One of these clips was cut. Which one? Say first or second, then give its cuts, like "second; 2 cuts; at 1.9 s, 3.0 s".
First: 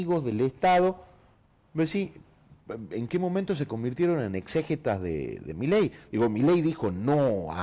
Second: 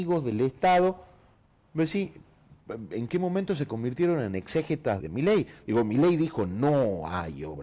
second; 1 cut; at 5.0 s